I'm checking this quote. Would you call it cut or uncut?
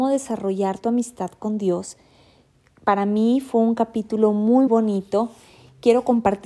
cut